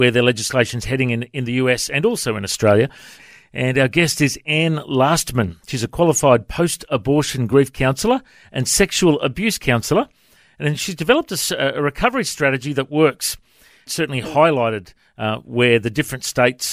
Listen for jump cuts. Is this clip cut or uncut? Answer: cut